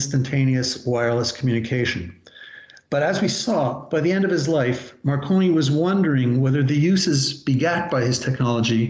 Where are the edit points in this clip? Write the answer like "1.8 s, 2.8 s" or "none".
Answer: none